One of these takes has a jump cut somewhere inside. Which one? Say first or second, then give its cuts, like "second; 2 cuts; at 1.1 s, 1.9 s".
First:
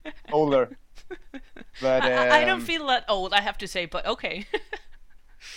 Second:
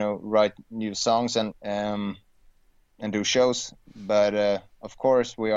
second; 1 cut; at 1.5 s